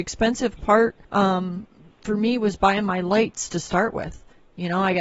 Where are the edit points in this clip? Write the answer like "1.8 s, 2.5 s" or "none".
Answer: 1.0 s